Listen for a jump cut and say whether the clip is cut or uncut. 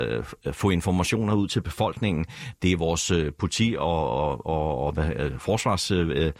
uncut